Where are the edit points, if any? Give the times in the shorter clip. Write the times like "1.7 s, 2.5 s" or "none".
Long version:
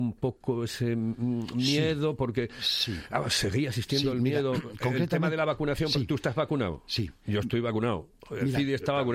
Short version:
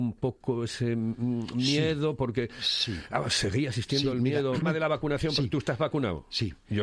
4.6 s